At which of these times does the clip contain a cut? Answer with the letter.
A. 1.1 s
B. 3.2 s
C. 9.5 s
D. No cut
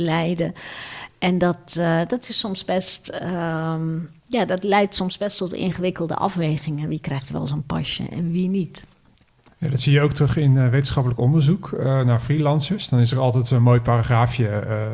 D